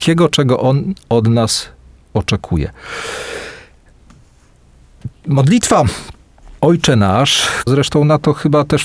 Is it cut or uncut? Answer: cut